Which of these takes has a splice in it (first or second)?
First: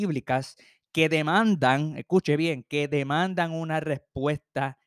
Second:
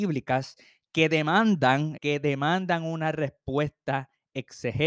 second